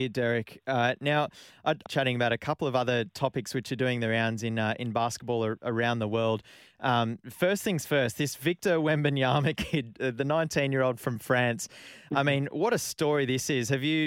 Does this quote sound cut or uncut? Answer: cut